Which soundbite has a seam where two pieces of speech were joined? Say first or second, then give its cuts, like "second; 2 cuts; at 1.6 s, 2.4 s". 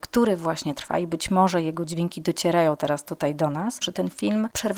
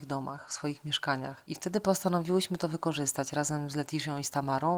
first; 1 cut; at 3.8 s